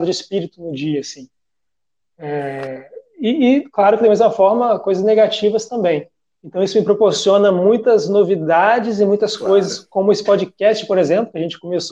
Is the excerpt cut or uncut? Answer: cut